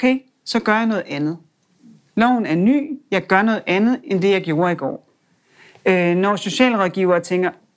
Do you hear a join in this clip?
no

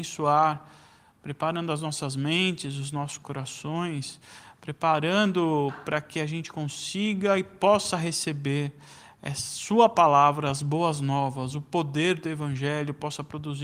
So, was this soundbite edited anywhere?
no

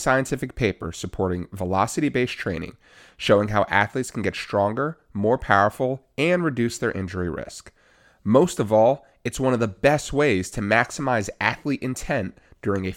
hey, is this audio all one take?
yes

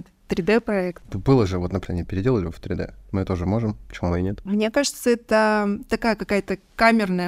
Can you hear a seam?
yes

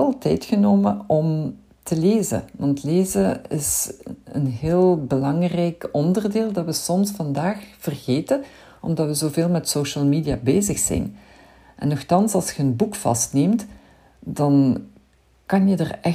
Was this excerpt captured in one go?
yes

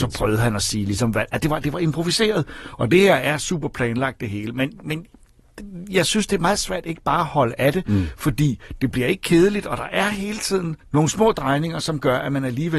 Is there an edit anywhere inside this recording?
yes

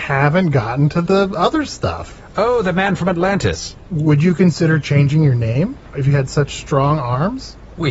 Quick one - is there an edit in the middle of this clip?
yes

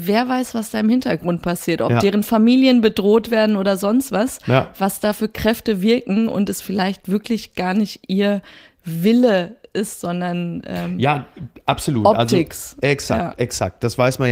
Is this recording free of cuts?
yes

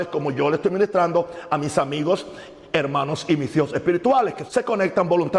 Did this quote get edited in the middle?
yes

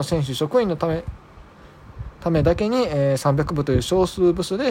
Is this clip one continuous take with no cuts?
yes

